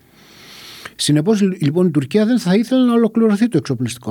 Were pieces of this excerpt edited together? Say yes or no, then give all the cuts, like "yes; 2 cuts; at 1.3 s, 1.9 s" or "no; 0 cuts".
yes; 1 cut; at 1.0 s